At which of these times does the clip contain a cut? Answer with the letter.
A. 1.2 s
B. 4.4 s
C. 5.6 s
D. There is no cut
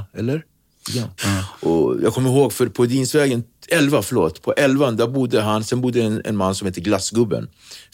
A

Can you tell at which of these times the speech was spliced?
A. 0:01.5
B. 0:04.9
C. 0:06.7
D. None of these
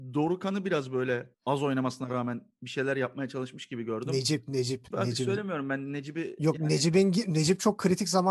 B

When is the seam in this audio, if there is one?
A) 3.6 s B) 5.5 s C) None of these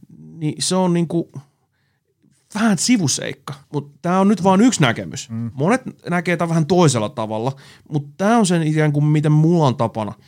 A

